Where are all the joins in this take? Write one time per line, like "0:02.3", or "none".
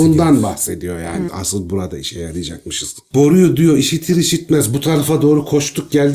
0:01.3